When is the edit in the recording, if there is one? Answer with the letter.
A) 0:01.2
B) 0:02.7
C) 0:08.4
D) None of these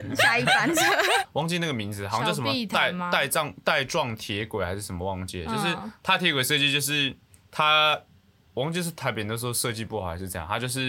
A